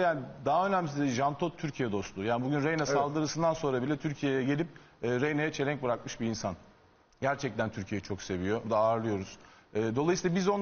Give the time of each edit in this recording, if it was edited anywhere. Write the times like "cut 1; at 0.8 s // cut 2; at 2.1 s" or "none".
cut 1; at 8.6 s